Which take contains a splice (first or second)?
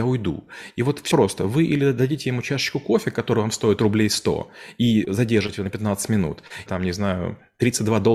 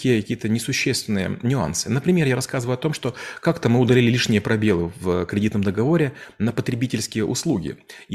first